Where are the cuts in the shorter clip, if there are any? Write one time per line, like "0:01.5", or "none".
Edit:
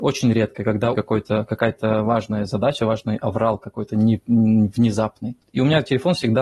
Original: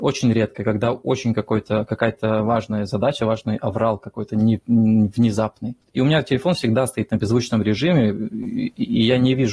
0:00.9